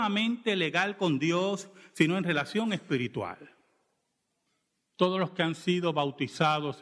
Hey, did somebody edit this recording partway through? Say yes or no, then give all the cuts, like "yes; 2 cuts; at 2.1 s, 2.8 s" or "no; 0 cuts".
yes; 1 cut; at 4.8 s